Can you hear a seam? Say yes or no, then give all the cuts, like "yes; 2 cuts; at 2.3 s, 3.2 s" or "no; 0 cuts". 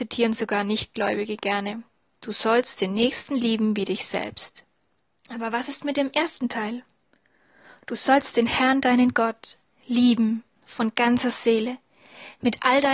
yes; 2 cuts; at 5.2 s, 10.6 s